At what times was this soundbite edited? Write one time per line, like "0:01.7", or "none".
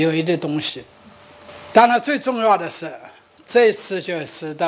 none